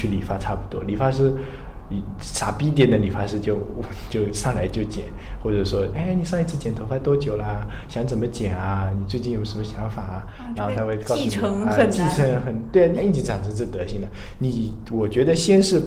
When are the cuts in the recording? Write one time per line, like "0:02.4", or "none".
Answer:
0:05.9
0:13.0